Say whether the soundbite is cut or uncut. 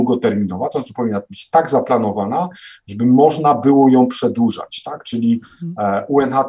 uncut